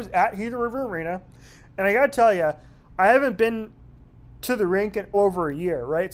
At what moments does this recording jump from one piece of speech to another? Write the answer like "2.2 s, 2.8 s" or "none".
5.1 s